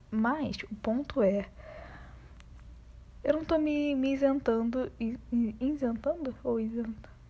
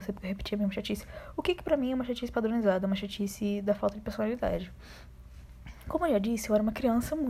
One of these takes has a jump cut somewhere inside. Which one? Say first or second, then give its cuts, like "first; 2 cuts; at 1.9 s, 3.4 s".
first; 1 cut; at 3.2 s